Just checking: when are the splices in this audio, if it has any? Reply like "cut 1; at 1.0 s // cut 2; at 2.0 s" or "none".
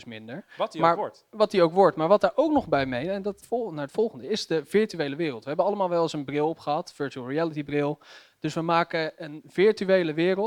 cut 1; at 3.4 s